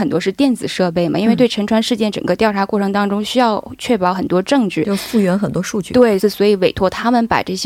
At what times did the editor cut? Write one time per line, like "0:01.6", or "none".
0:06.2